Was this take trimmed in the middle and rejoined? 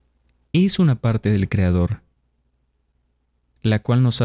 no; 0 cuts

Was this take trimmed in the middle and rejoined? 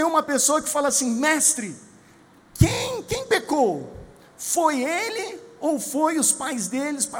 no; 0 cuts

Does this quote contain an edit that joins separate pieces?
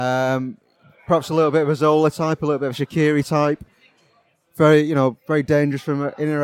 no; 0 cuts

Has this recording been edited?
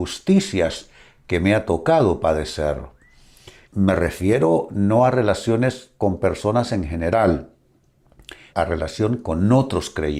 yes; 2 cuts; at 3.7 s, 8.5 s

